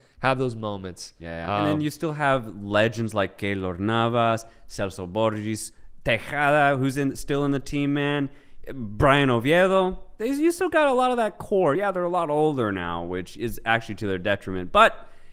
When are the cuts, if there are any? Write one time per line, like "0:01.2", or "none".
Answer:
none